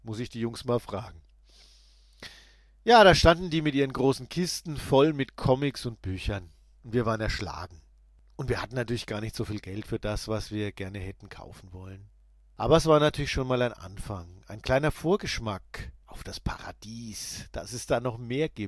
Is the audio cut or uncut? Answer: uncut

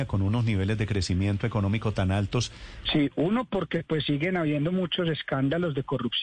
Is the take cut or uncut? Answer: cut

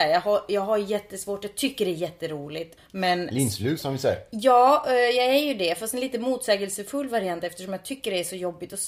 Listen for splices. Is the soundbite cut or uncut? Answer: cut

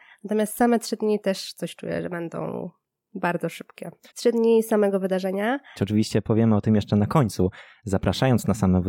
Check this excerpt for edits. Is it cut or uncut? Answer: cut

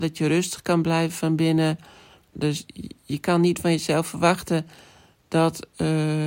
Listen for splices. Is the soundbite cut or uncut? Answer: cut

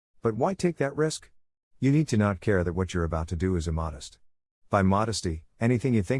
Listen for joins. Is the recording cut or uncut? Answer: uncut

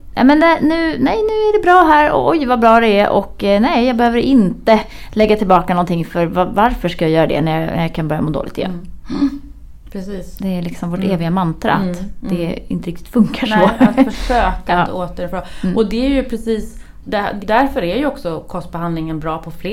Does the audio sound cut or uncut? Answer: cut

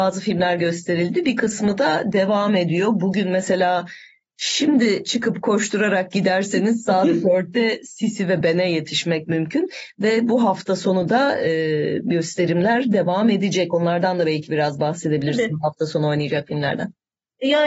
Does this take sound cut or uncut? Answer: uncut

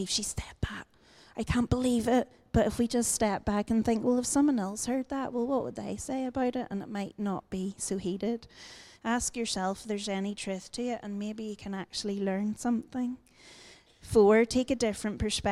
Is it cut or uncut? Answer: cut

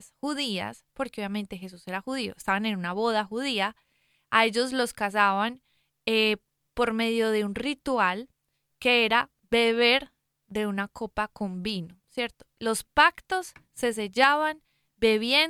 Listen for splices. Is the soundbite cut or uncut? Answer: uncut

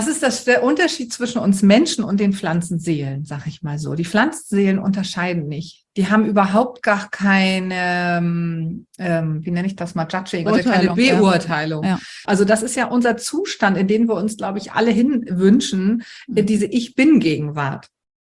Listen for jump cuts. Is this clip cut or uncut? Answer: cut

